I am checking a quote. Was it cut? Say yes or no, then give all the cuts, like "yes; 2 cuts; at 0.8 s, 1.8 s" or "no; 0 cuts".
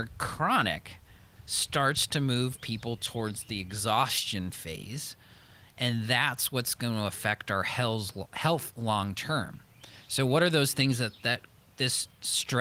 no; 0 cuts